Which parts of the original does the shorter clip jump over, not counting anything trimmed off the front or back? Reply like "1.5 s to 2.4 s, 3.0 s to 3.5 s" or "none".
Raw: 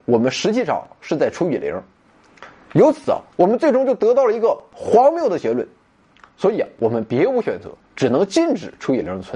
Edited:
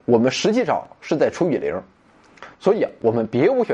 2.5 s to 6.3 s